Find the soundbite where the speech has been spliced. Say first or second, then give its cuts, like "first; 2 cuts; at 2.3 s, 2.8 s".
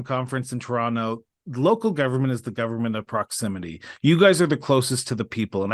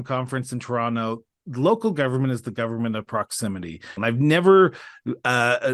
second; 1 cut; at 4.0 s